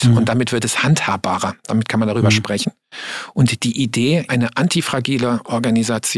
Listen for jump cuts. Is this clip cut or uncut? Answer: cut